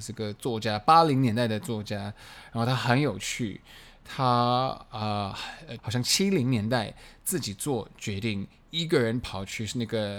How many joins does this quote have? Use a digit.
1